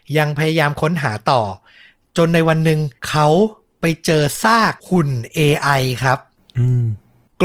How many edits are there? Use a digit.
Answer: 2